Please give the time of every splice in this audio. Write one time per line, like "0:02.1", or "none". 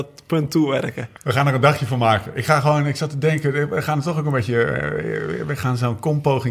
0:01.2